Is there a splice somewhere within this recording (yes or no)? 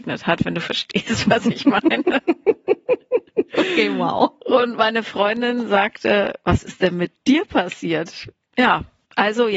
no